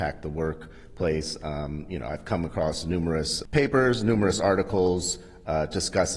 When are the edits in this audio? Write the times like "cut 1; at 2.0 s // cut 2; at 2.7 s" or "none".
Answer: none